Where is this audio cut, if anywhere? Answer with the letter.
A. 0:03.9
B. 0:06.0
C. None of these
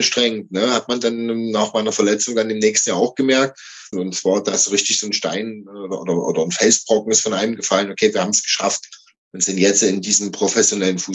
A